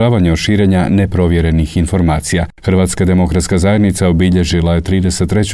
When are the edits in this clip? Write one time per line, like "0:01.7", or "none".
0:02.5